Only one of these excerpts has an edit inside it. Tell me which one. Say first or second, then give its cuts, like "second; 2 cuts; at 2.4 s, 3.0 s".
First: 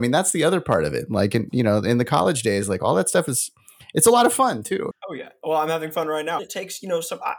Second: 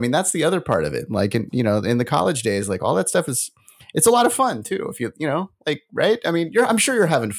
first; 2 cuts; at 4.9 s, 6.4 s